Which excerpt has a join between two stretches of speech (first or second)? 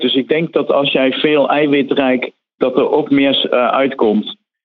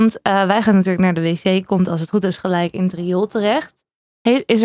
first